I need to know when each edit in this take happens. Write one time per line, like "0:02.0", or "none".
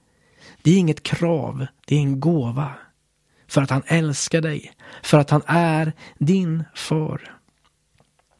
none